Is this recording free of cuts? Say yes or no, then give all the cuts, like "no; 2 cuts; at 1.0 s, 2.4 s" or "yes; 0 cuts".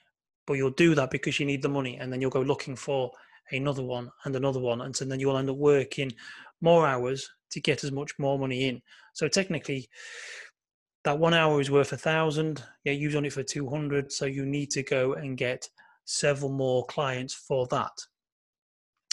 yes; 0 cuts